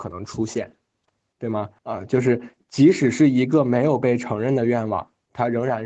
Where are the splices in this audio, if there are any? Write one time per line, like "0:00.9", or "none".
0:01.8